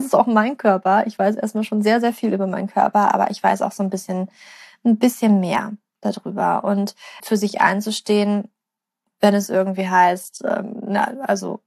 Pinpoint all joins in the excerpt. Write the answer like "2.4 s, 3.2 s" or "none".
7.2 s